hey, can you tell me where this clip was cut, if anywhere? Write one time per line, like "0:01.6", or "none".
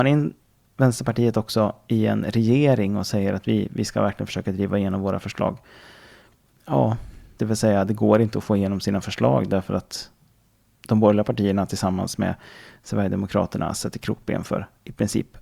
0:07.4